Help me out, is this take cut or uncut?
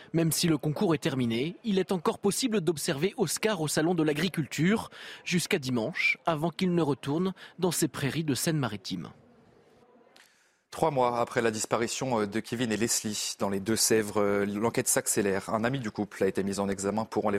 uncut